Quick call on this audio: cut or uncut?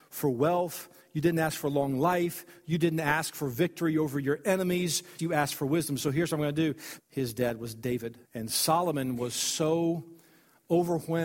cut